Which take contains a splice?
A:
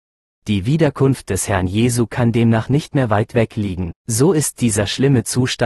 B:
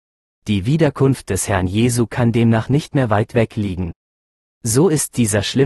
A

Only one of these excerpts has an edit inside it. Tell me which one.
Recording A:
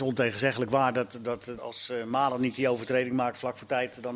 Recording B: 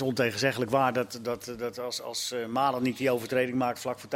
A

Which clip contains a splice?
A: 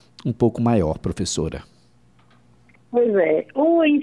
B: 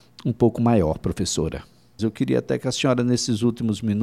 B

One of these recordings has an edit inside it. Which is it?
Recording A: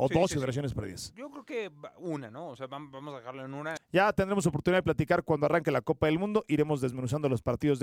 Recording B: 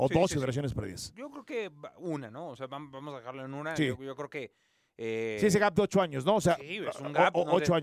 A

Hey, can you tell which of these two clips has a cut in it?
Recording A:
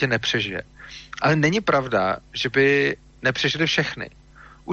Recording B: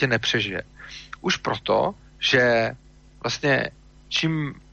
B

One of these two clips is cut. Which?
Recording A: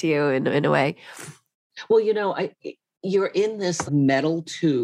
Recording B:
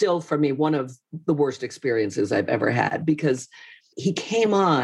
A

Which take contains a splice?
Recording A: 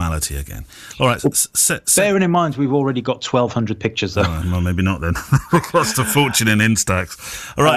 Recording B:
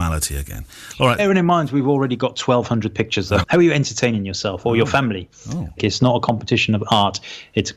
B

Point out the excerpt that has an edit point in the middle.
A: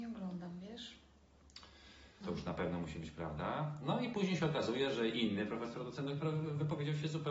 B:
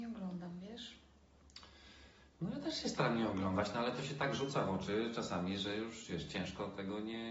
A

